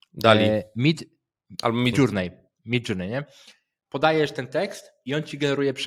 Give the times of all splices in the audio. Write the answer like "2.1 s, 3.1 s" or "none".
1.9 s